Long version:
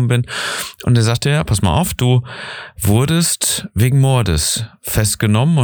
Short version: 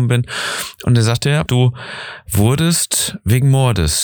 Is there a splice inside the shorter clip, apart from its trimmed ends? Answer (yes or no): yes